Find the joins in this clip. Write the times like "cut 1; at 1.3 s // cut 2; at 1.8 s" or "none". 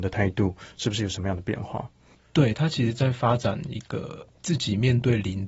cut 1; at 2.2 s